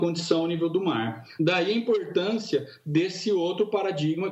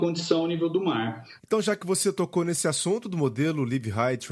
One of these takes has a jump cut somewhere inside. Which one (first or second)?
second